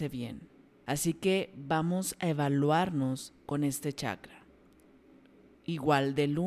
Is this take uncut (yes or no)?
yes